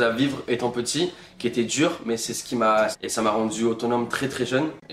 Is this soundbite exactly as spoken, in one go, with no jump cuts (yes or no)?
no